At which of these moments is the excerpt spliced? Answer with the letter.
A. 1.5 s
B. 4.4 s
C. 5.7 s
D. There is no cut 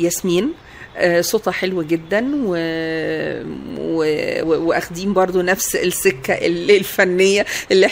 B